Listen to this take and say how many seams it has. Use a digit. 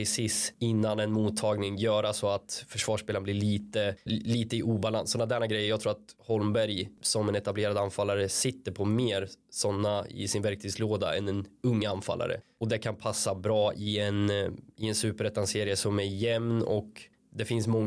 1